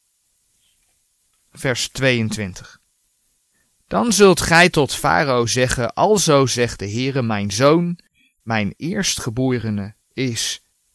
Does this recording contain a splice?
no; 0 cuts

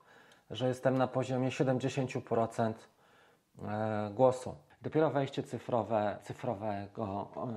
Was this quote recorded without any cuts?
no; 2 cuts; at 4.7 s, 6.2 s

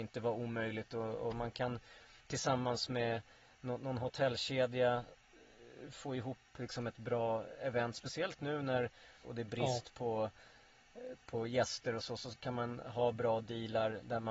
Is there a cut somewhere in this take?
yes; 1 cut; at 9.2 s

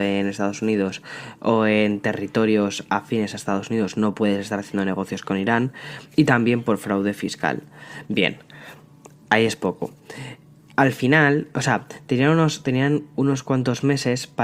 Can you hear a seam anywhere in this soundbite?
no; 0 cuts

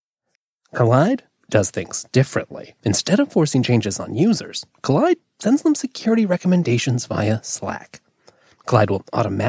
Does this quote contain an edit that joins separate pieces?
yes; 1 cut; at 2.8 s

